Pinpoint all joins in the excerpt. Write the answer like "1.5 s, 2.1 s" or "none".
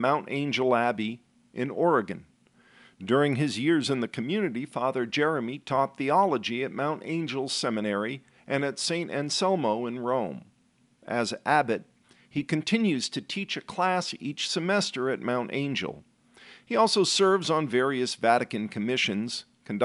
none